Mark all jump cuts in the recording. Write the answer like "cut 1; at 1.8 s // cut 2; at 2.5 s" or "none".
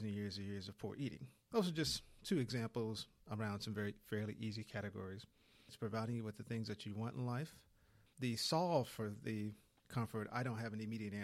cut 1; at 5.7 s // cut 2; at 8.1 s